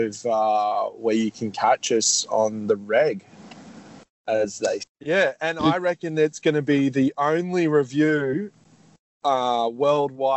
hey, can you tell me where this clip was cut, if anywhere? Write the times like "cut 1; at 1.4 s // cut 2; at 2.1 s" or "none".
cut 1; at 4.8 s